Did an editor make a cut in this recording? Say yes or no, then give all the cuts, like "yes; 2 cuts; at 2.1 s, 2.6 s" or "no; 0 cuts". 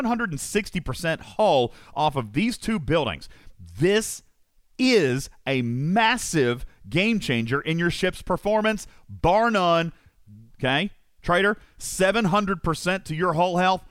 yes; 1 cut; at 10.5 s